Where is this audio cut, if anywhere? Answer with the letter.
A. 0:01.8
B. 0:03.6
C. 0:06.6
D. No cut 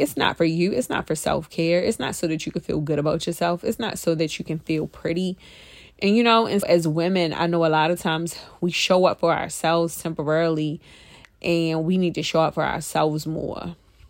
C